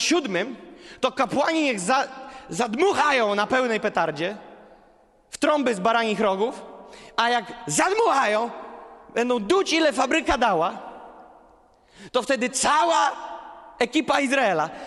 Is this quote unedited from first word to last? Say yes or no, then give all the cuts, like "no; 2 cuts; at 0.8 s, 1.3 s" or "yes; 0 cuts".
yes; 0 cuts